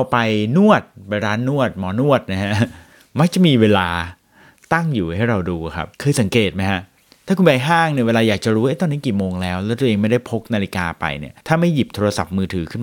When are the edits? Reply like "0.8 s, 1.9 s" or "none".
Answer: 5.9 s, 11.4 s